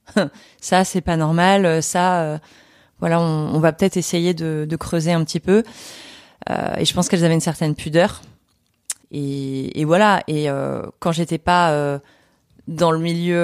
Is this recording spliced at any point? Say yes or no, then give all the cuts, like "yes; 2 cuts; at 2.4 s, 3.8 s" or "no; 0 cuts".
yes; 1 cut; at 9.0 s